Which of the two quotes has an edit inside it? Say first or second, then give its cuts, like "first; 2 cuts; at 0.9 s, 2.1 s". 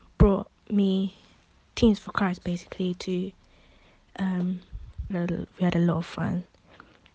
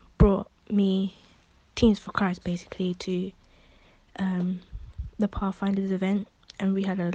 first; 1 cut; at 5.1 s